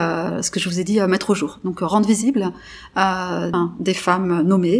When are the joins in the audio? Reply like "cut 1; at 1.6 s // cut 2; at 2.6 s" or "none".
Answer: cut 1; at 3.5 s